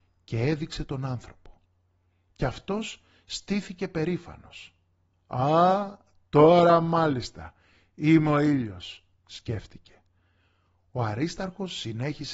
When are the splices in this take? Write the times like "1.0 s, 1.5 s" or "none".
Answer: none